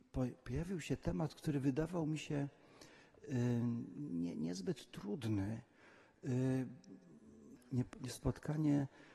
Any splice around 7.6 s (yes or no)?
yes